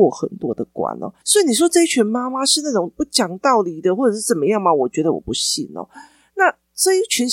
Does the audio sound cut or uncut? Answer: uncut